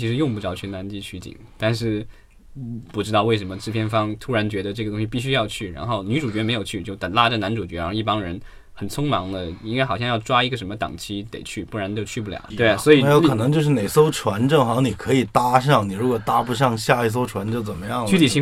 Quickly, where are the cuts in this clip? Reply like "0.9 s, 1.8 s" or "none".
12.5 s